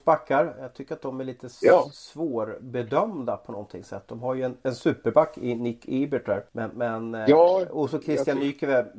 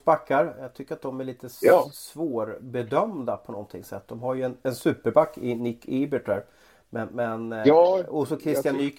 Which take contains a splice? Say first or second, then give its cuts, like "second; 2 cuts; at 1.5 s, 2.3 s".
first; 1 cut; at 6.5 s